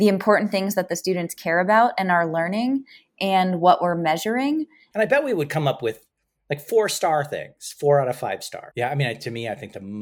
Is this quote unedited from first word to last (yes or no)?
no